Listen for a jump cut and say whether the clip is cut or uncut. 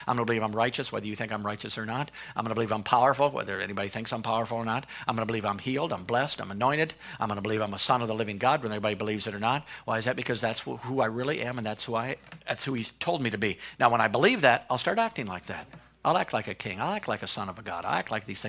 uncut